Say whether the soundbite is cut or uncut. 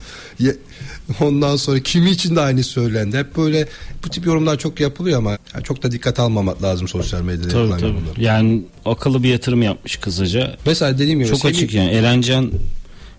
cut